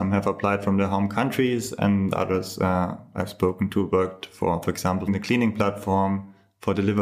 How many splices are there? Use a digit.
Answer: 1